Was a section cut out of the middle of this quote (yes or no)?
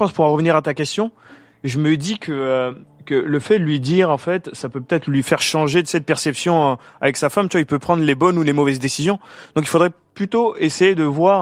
no